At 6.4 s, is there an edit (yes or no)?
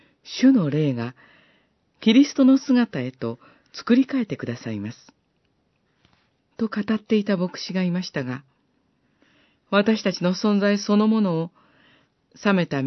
yes